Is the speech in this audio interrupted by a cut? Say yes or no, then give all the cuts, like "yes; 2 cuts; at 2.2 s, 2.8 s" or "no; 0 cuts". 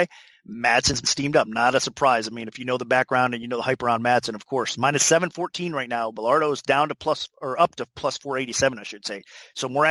no; 0 cuts